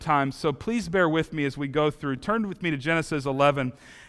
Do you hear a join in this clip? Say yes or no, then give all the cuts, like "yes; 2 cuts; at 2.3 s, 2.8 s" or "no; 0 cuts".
no; 0 cuts